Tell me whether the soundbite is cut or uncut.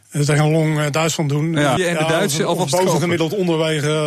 cut